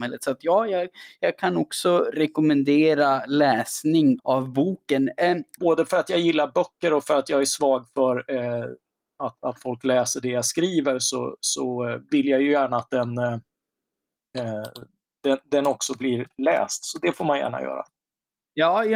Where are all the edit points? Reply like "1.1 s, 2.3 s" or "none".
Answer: 4.2 s, 5.6 s